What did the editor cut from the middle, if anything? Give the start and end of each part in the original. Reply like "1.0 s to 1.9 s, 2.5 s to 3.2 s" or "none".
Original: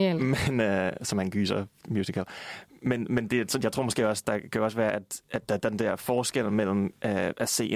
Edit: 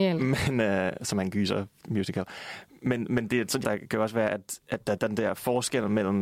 3.6 s to 4.2 s

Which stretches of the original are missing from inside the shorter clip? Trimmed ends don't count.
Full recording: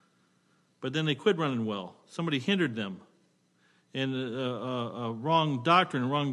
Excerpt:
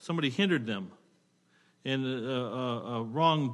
none

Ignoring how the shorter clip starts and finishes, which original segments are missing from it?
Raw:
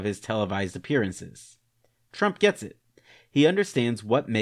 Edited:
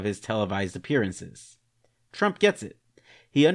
none

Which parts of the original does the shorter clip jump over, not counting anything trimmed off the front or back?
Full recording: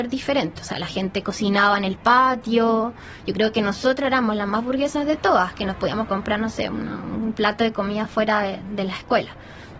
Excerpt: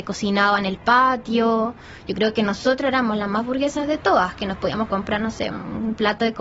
6.7 s to 6.9 s

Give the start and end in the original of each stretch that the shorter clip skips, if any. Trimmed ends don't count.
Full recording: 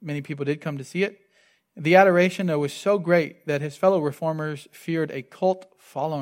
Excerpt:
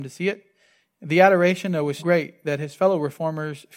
2.7 s to 3.0 s

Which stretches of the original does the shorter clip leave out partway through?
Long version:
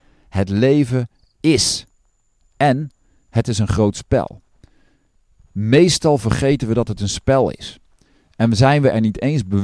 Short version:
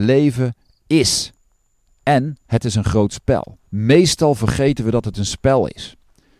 2.9 s to 3.2 s, 4.5 s to 5.5 s

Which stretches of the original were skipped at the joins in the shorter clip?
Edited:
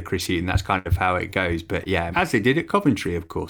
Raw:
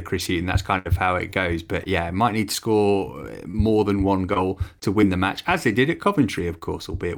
2.1 s to 5.4 s

